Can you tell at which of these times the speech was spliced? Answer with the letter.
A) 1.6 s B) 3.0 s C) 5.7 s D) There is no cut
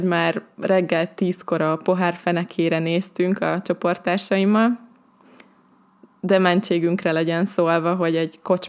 D